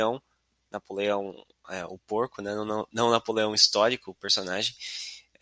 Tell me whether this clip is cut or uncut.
uncut